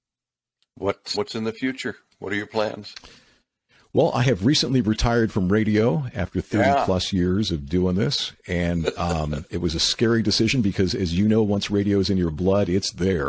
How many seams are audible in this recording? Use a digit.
1